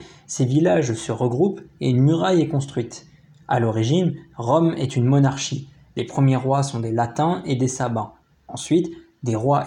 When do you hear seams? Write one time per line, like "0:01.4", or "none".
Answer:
none